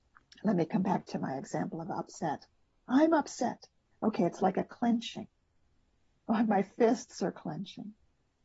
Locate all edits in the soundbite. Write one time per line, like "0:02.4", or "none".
0:03.8